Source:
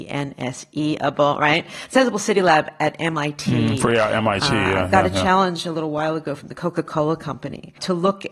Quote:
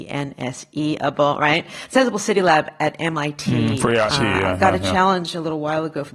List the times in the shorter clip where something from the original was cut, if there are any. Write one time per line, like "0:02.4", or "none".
0:04.1